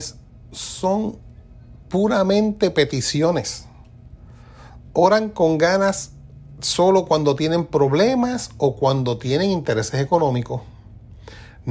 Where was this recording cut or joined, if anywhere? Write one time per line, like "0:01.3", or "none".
none